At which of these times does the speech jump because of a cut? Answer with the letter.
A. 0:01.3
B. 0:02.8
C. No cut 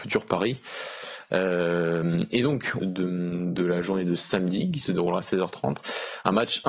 B